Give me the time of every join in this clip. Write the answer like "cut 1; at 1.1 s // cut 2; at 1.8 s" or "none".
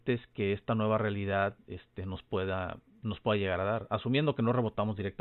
none